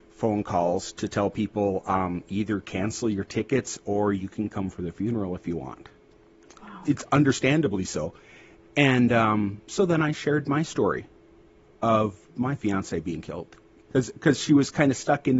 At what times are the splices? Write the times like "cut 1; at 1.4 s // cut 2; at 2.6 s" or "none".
cut 1; at 6.8 s